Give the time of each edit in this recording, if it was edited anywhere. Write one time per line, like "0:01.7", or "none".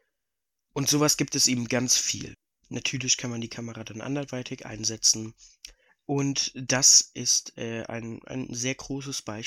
none

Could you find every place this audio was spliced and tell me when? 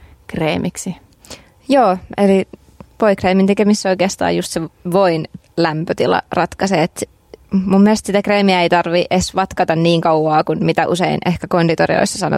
none

